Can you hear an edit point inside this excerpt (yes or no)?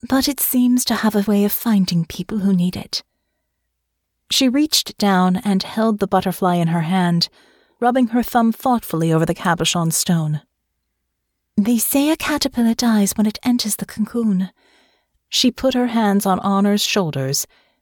yes